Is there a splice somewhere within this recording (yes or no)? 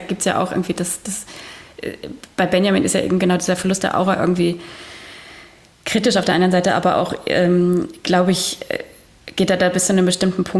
no